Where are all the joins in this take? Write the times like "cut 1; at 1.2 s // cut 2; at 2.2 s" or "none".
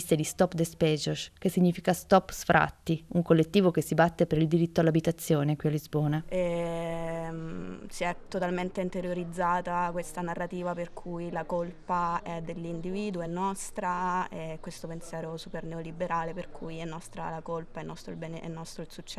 none